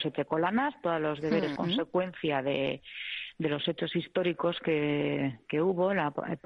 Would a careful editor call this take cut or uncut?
cut